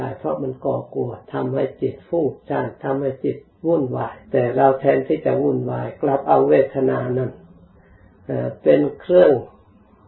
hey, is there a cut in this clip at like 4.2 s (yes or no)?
yes